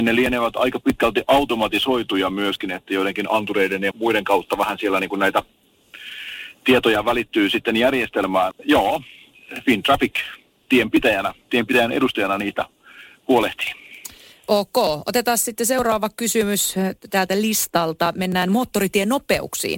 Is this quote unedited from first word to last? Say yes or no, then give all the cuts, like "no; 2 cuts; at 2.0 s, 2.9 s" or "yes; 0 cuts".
no; 3 cuts; at 3.9 s, 8.5 s, 14.3 s